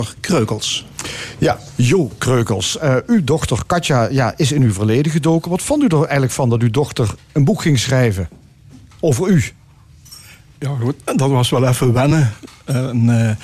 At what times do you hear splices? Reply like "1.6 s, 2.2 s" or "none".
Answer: none